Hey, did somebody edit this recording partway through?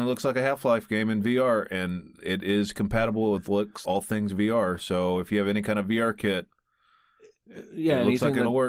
yes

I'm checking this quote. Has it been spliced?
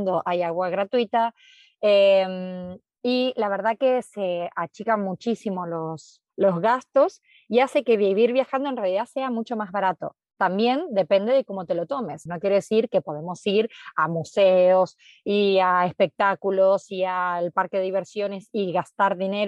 yes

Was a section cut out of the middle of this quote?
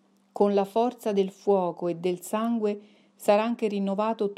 no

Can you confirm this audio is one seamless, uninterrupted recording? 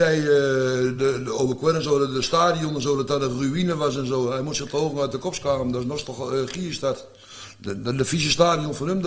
yes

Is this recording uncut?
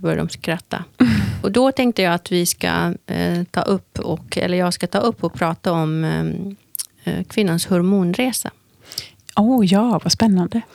no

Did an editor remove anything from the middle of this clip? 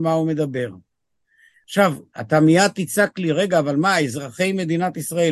no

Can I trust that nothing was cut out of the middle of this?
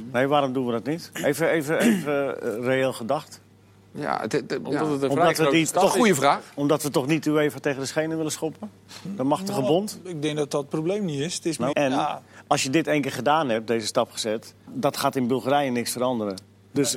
no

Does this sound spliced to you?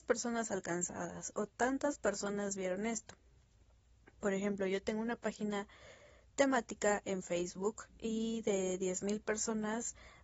no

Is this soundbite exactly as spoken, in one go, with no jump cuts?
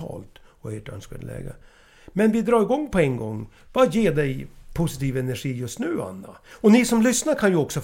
yes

